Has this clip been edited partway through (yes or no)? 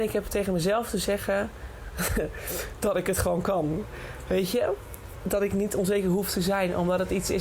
no